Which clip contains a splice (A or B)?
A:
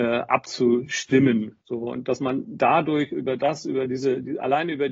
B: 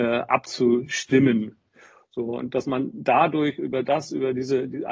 A